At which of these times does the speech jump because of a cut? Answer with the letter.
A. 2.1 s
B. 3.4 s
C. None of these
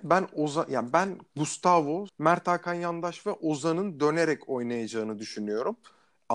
A